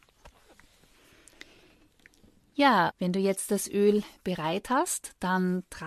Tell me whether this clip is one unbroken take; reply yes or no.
no